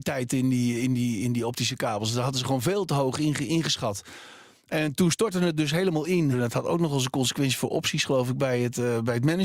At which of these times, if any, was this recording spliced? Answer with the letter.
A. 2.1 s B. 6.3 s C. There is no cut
B